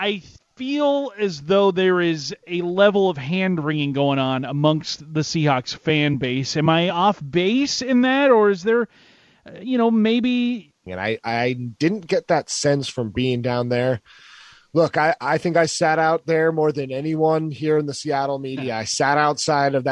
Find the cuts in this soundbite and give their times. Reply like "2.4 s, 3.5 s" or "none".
10.9 s